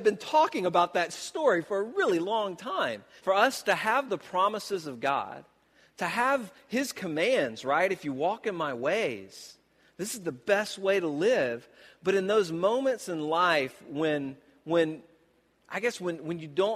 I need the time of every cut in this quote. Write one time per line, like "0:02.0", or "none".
0:03.2